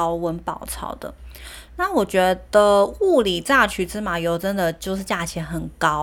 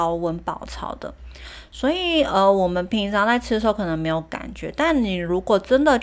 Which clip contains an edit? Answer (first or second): first